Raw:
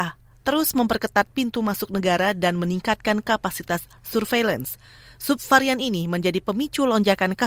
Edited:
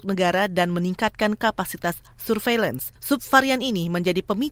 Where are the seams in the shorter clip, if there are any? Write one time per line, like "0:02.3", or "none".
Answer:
0:03.0

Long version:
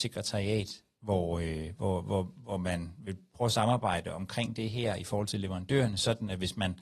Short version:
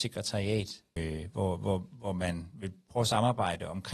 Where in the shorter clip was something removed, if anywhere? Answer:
0:01.0

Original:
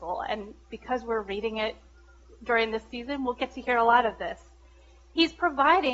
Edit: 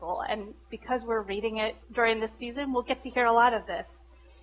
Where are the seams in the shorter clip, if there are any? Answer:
0:01.8

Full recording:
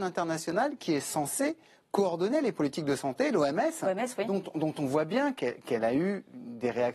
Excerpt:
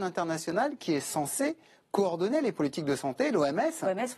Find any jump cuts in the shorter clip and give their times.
none

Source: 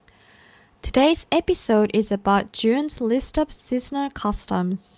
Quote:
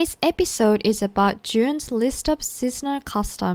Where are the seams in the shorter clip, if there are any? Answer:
none

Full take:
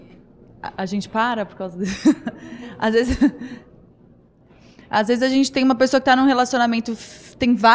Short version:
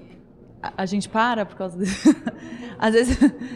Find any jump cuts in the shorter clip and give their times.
none

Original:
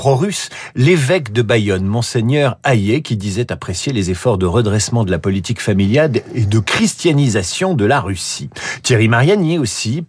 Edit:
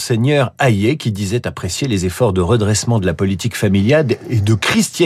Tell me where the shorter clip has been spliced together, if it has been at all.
none

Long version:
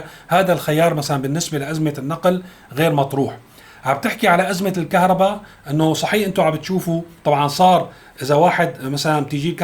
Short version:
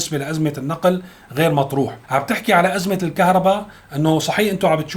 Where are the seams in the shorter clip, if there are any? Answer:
0:02.0

